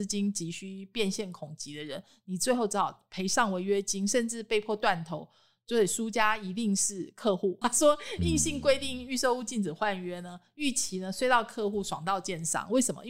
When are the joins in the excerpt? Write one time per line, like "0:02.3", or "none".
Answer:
0:07.6